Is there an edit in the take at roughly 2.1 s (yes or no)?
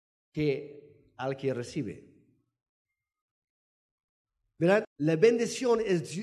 no